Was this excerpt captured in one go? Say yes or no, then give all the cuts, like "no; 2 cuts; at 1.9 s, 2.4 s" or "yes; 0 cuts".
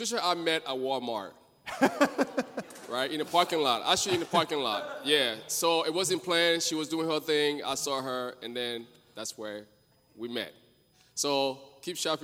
yes; 0 cuts